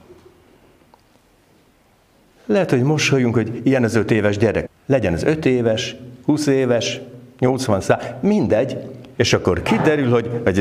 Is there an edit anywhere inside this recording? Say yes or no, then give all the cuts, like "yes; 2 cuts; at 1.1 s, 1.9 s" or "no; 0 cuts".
yes; 2 cuts; at 4.7 s, 9.1 s